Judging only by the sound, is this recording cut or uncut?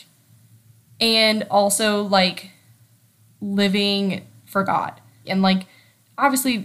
cut